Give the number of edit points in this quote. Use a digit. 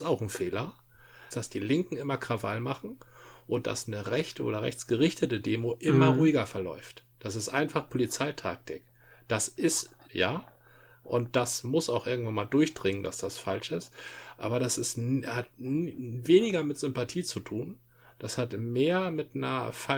2